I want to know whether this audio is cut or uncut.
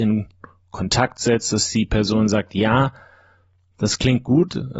uncut